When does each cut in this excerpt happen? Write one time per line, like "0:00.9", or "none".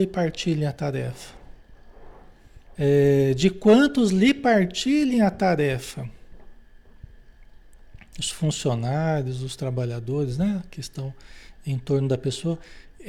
0:02.7